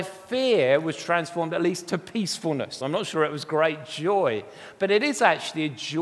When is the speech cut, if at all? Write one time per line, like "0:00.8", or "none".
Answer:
none

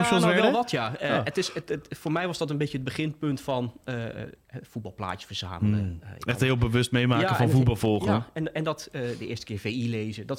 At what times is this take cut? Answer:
none

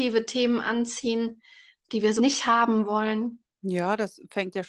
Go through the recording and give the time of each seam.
0:02.2

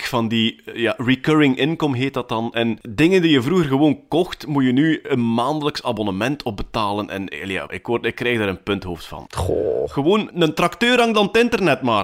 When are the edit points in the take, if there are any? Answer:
0:07.7
0:09.3

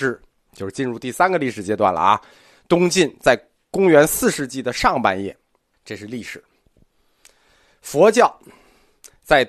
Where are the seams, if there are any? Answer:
0:05.7

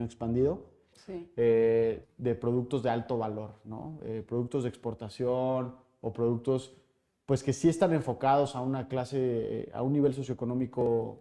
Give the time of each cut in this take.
0:00.9
0:02.0

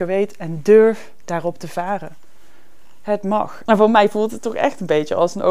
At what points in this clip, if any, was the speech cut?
0:03.7

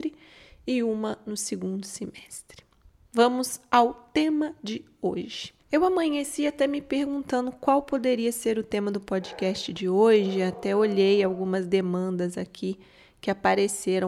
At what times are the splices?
none

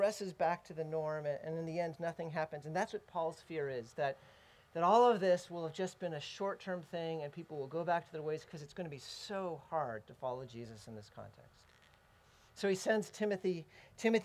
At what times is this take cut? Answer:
none

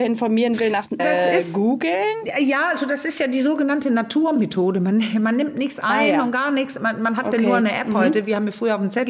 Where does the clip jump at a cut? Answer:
0:01.0

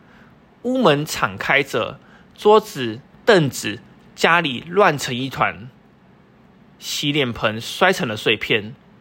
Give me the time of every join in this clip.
0:03.1

